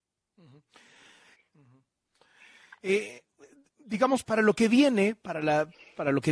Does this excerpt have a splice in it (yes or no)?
yes